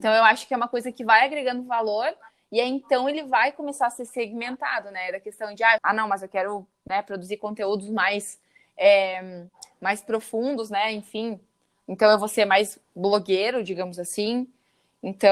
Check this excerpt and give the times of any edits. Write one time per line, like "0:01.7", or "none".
0:05.8

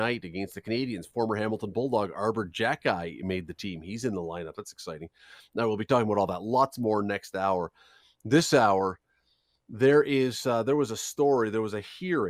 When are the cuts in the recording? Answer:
none

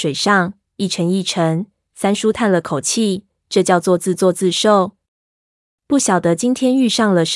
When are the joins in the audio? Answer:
0:05.0

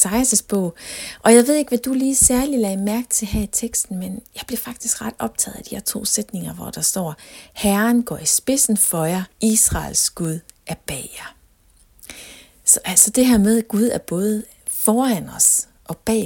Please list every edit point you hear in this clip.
0:09.3

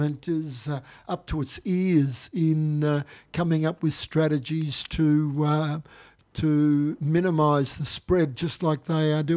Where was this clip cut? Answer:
none

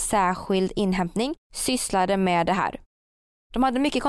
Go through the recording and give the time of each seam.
0:01.4

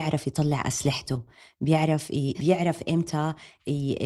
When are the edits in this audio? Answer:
0:02.4

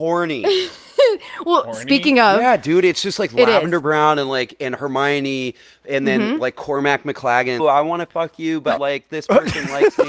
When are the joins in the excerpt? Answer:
0:07.6
0:08.8

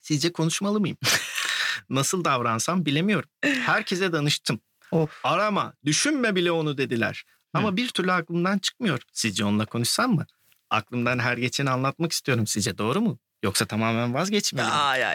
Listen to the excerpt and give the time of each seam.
none

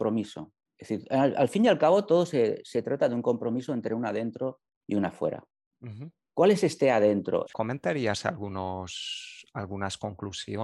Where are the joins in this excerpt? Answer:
0:07.5

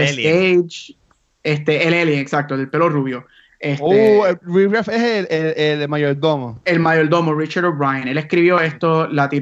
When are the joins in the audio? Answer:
0:03.5

